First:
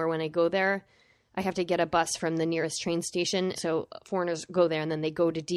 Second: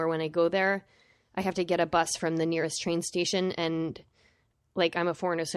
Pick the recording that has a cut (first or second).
first